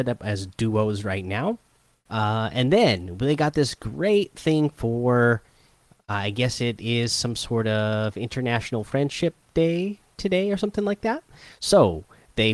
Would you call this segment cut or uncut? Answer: cut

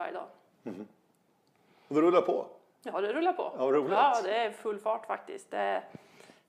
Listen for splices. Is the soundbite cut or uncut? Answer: uncut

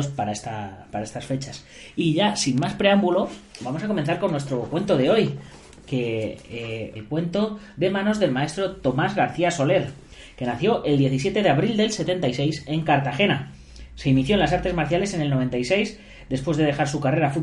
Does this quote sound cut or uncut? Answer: cut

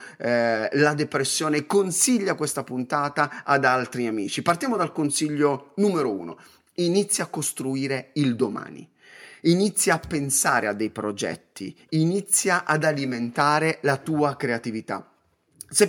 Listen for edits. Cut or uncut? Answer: uncut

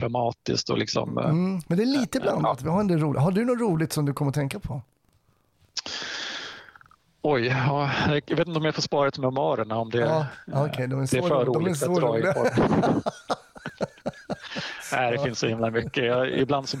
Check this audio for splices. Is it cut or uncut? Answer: uncut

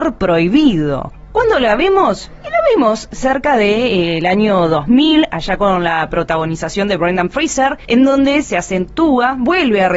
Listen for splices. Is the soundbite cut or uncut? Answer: uncut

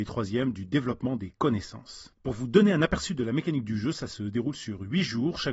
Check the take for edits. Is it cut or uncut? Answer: cut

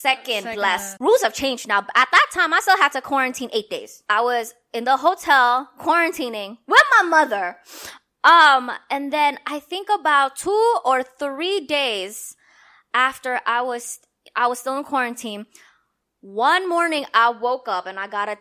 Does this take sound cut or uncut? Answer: cut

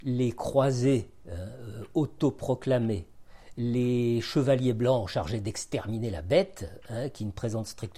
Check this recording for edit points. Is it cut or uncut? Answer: uncut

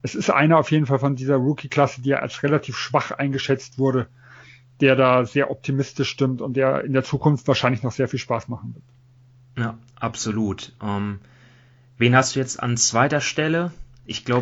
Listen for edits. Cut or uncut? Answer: uncut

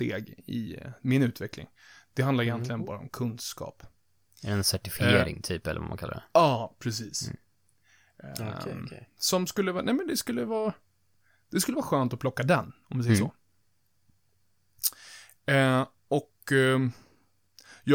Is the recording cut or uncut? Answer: uncut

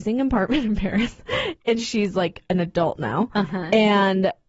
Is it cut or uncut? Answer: uncut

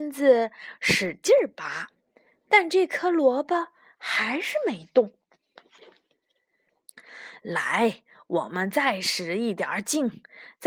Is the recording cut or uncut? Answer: uncut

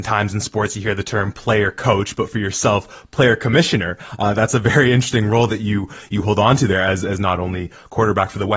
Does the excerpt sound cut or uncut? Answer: uncut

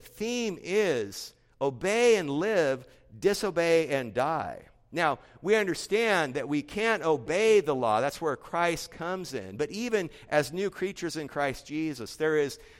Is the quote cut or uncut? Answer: uncut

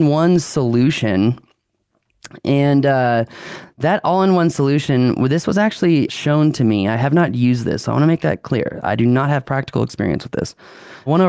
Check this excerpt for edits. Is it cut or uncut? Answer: cut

